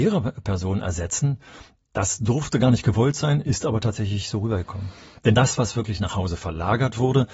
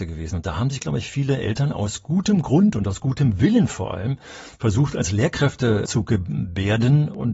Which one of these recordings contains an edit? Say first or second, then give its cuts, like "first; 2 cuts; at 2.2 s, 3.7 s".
first; 1 cut; at 5.2 s